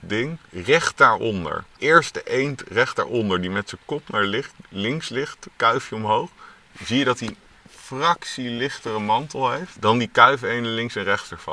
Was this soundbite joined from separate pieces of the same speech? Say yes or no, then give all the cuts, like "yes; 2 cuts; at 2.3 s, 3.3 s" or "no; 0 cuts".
no; 0 cuts